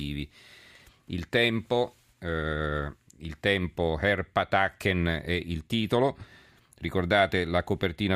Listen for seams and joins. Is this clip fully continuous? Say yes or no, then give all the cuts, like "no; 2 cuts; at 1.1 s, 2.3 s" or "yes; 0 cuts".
yes; 0 cuts